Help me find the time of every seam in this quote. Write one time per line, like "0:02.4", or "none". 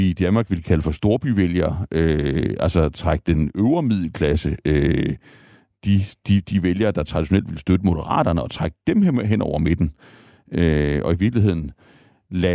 none